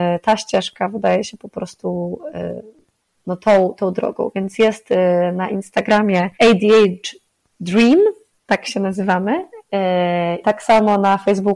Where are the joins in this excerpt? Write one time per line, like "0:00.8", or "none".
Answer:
0:06.3
0:10.4